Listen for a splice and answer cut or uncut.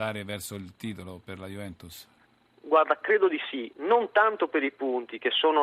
uncut